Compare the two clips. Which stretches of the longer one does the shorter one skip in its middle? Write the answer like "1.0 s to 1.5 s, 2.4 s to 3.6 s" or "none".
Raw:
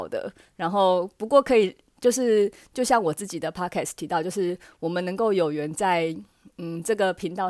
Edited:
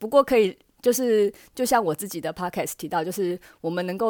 none